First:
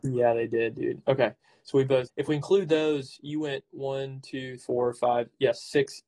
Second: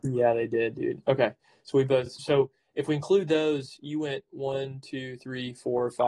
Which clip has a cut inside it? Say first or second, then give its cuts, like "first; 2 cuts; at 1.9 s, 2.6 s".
first; 2 cuts; at 2.1 s, 4.6 s